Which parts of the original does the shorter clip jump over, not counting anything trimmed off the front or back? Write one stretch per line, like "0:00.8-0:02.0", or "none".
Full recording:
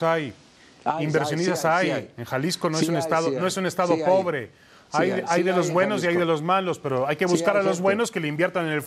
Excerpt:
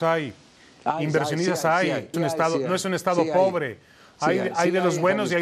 0:02.1-0:02.9